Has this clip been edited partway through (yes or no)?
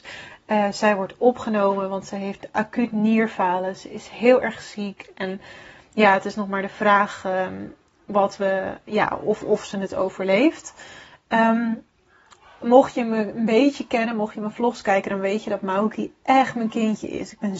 no